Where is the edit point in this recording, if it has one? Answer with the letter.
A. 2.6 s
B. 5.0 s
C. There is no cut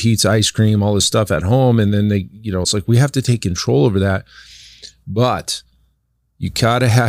A